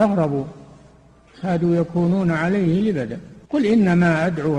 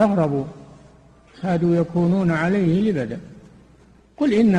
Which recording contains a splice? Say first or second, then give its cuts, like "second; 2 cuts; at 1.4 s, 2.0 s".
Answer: first; 1 cut; at 3.4 s